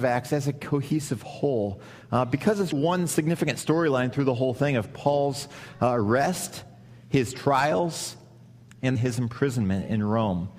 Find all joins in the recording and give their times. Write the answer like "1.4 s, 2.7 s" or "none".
2.7 s, 9.0 s